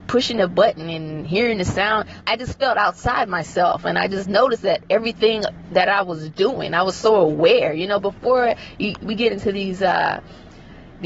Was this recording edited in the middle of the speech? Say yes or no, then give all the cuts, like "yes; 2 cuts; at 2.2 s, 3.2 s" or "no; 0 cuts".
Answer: yes; 1 cut; at 2.2 s